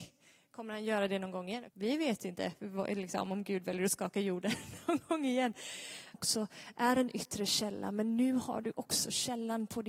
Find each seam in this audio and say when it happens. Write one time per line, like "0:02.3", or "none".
0:01.7
0:06.1